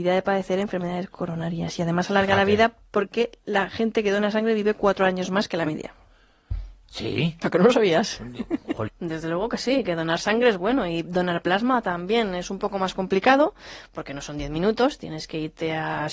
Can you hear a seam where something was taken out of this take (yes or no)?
yes